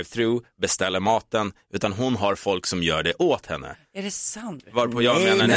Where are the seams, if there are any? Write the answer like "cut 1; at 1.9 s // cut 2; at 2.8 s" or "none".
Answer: cut 1; at 4.6 s